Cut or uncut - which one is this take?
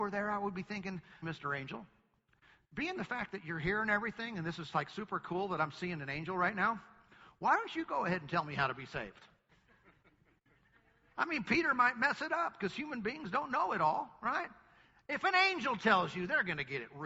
cut